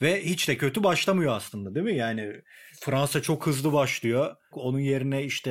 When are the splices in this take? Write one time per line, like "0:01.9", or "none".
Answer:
0:04.5